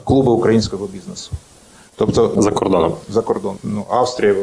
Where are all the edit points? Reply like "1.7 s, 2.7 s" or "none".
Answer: 2.4 s